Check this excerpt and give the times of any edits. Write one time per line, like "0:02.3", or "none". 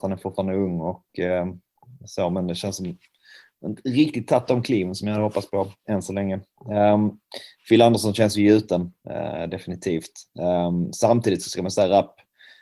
0:09.0